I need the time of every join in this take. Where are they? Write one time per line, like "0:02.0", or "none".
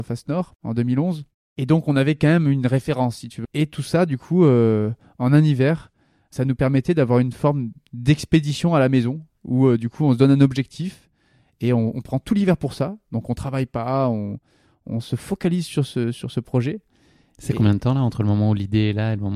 0:03.4